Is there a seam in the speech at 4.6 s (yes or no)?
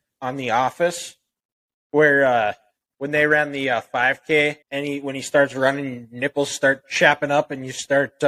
yes